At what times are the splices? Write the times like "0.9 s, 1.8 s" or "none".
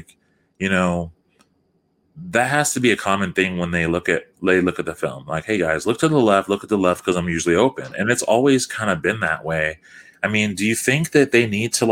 none